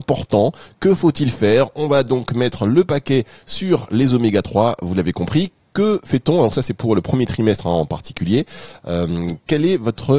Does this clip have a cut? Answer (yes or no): no